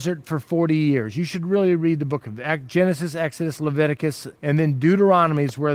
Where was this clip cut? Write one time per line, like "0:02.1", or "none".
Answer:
0:04.3